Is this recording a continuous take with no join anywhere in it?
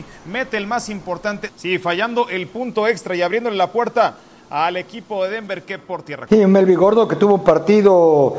no; 2 cuts; at 1.5 s, 6.3 s

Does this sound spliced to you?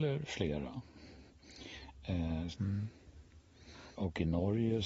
yes; 2 cuts; at 2.5 s, 3.9 s

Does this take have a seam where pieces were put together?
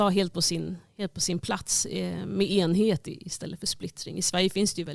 no; 0 cuts

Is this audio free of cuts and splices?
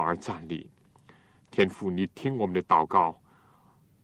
yes; 0 cuts

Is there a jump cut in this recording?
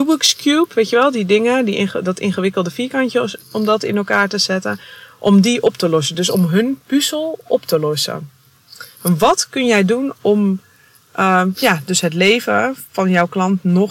no; 0 cuts

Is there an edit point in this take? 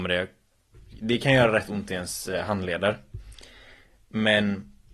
no; 0 cuts

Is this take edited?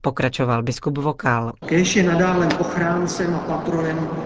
yes; 1 cut; at 1.6 s

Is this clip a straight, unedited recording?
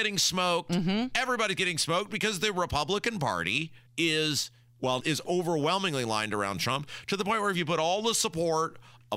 no; 2 cuts; at 3.9 s, 5.0 s

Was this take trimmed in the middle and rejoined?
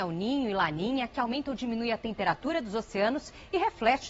no; 0 cuts

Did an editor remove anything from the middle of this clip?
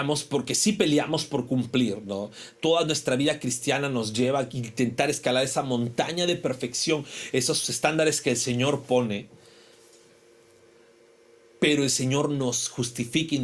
no; 0 cuts

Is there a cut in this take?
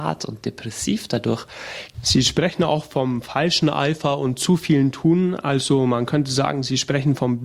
yes; 1 cut; at 1.9 s

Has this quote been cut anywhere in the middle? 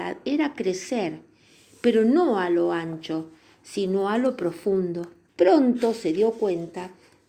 yes; 1 cut; at 5.3 s

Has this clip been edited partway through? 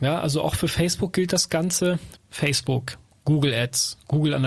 yes; 1 cut; at 2.1 s

